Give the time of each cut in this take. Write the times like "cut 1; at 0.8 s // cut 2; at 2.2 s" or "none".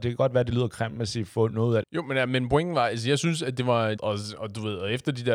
cut 1; at 1.8 s // cut 2; at 4.0 s

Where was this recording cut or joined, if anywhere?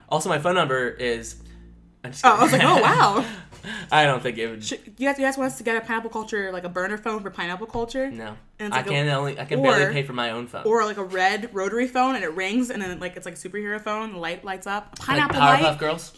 none

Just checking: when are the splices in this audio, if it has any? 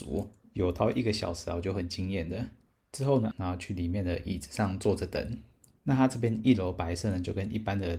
cut 1; at 3.3 s

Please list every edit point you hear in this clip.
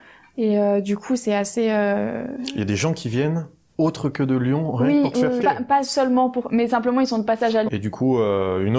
cut 1; at 5.4 s // cut 2; at 7.7 s

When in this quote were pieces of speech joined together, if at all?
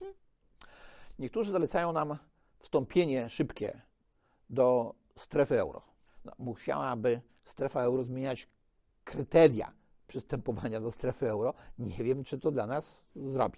cut 1; at 6.1 s

